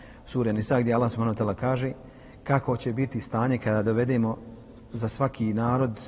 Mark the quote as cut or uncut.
uncut